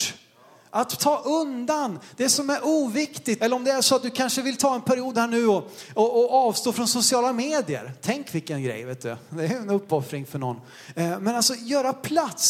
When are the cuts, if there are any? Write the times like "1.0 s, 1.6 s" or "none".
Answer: 3.4 s